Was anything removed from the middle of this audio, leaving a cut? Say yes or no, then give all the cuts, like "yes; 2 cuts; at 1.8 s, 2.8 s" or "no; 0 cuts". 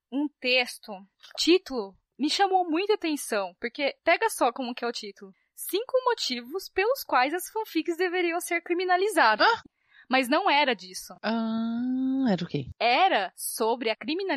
no; 0 cuts